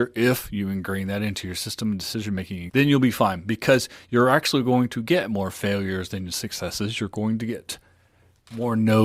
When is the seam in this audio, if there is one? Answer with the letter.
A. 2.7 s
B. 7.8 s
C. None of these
A